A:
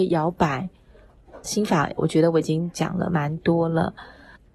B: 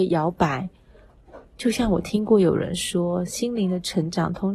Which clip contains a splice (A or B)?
A